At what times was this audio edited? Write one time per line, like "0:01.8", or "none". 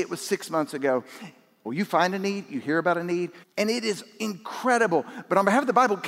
0:01.7
0:03.4